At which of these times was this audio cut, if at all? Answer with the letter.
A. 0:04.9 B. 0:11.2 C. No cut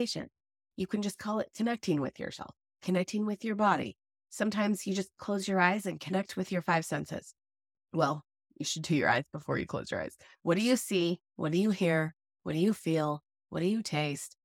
C